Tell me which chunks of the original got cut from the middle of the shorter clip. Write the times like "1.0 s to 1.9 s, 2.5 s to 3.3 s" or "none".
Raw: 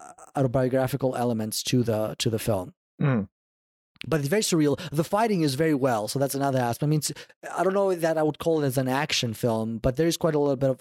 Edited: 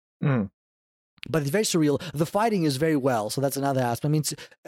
none